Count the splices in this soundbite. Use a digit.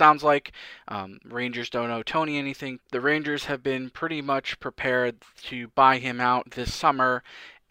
1